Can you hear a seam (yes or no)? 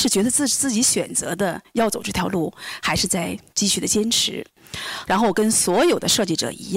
yes